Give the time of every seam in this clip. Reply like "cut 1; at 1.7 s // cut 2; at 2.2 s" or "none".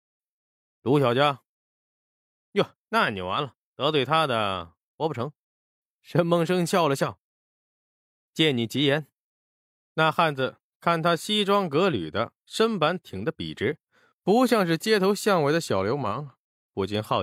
none